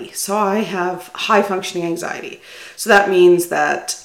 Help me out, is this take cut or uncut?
uncut